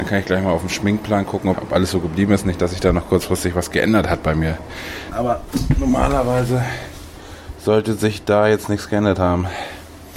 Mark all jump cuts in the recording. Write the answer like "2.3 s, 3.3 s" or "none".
1.5 s, 5.1 s